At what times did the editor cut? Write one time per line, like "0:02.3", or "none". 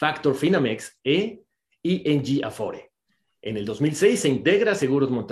none